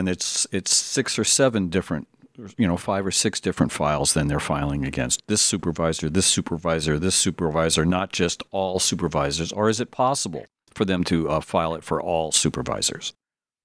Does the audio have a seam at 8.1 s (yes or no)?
no